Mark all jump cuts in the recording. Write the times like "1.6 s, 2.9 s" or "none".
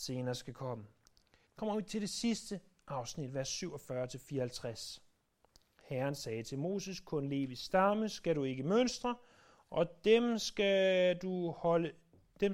1.5 s, 5.8 s